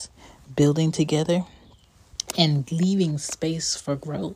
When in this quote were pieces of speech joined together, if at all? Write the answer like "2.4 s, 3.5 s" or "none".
none